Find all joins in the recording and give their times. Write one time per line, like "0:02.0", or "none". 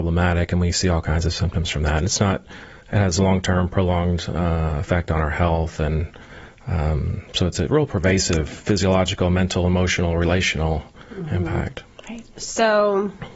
none